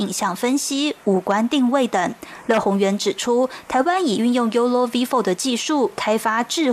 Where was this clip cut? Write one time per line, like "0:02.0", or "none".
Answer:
none

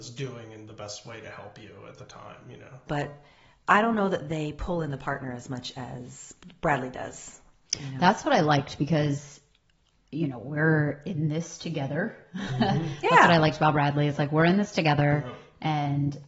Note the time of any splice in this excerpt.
0:02.9

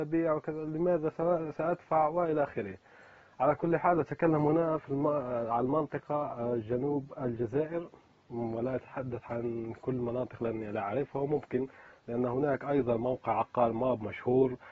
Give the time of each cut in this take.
none

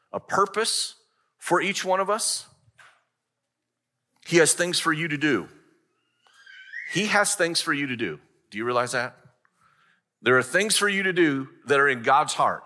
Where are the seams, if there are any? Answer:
none

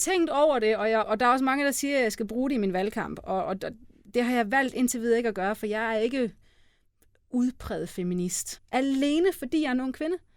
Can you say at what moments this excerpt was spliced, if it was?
0:01.0
0:08.6

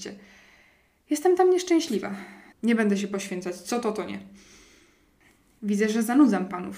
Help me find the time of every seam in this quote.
0:02.5

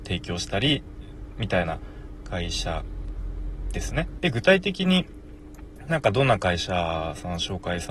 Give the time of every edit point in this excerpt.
0:04.2

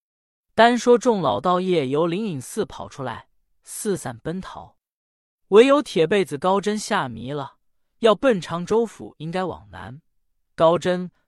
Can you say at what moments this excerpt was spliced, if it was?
0:03.6

